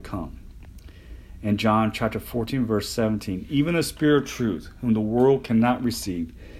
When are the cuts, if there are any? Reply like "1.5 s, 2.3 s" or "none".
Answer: none